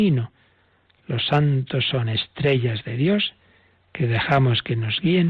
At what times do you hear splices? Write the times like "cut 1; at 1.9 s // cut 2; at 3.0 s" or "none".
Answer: none